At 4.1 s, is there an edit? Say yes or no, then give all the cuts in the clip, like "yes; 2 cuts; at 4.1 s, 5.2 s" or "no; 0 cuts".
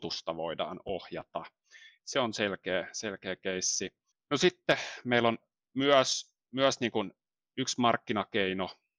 yes; 2 cuts; at 2.0 s, 4.1 s